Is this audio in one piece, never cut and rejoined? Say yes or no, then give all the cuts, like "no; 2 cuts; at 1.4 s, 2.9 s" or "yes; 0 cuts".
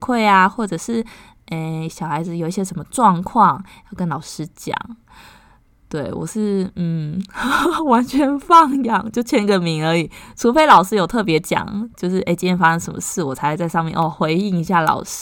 yes; 0 cuts